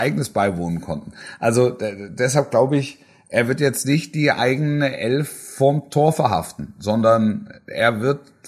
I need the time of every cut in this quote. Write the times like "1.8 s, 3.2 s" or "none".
none